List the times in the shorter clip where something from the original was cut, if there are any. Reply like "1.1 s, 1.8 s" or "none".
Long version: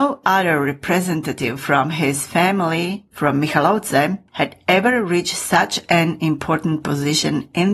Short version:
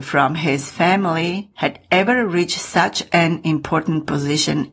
1.5 s